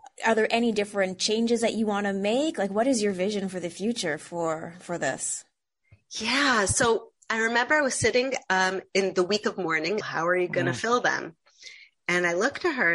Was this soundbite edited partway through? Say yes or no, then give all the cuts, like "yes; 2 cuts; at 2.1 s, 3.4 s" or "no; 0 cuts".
yes; 1 cut; at 10.0 s